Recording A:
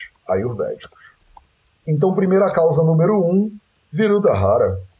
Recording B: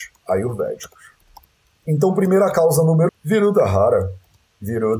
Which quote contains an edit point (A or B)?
B